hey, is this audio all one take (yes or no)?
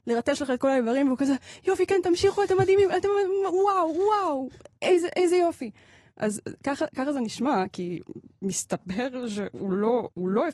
yes